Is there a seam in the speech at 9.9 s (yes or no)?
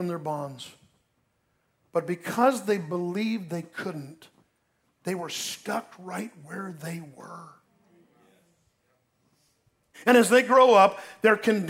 yes